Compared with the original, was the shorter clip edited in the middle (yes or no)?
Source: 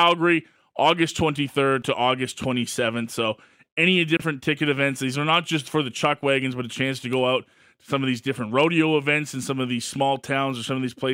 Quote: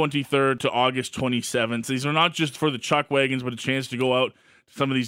yes